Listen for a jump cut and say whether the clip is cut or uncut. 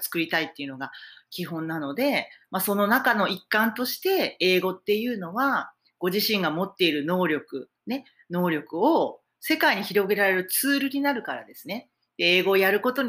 uncut